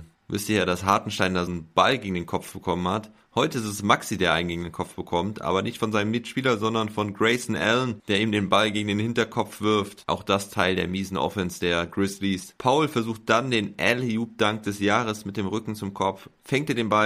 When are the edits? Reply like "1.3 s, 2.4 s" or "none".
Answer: 1.5 s, 12.6 s